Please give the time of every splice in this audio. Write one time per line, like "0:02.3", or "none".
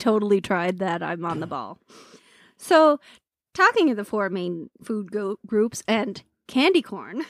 none